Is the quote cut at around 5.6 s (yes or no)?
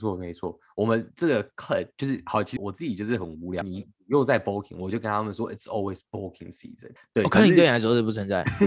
no